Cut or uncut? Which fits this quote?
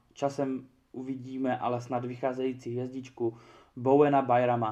uncut